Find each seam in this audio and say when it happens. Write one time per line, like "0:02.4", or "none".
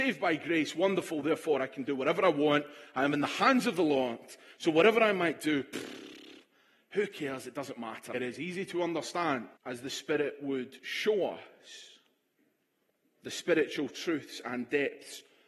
0:08.1
0:09.6